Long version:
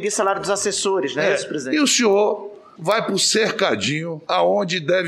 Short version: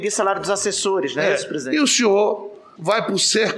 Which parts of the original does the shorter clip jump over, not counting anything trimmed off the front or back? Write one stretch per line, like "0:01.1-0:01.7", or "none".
none